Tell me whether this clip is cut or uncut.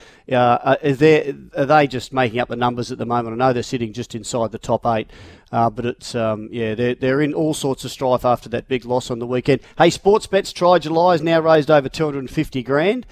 uncut